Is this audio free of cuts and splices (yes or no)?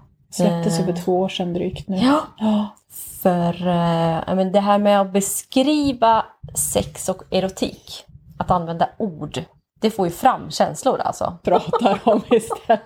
no